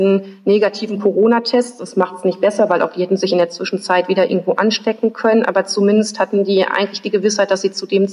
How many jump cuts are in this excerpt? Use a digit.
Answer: 0